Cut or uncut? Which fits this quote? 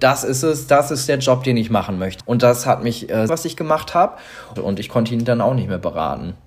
cut